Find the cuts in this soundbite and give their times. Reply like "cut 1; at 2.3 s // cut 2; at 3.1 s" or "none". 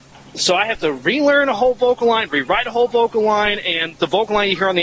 none